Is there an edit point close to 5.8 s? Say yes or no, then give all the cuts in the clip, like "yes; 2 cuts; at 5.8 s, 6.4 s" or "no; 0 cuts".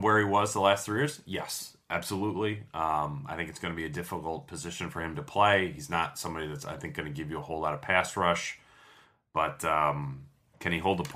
no; 0 cuts